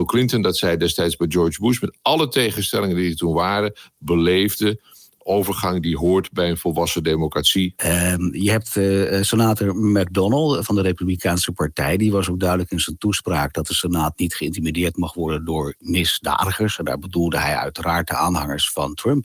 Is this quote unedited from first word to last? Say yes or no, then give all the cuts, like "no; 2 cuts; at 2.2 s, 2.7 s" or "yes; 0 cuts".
no; 2 cuts; at 3.9 s, 7.8 s